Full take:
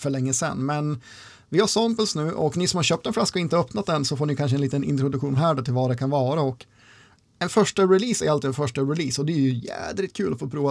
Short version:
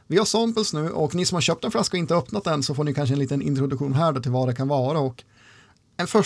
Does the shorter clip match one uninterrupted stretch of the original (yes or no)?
yes